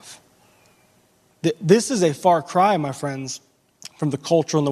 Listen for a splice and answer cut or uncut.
uncut